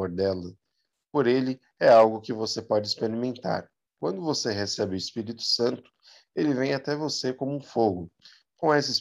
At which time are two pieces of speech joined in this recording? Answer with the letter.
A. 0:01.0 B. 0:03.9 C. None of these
C